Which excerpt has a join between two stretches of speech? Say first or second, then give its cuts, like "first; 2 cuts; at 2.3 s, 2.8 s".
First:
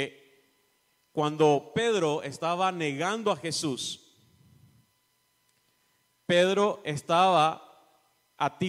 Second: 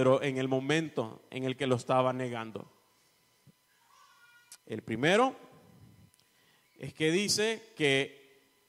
second; 1 cut; at 4.6 s